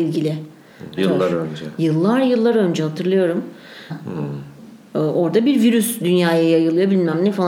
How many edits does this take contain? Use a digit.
2